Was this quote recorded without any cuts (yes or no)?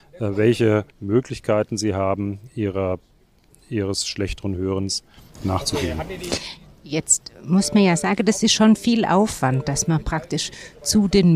no